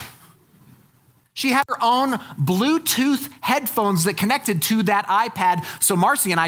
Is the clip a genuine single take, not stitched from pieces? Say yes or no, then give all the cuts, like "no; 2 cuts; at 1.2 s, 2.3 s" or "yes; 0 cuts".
no; 1 cut; at 1.2 s